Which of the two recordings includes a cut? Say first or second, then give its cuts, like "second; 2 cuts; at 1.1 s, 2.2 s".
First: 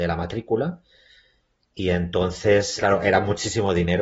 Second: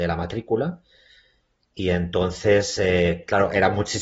first; 1 cut; at 2.8 s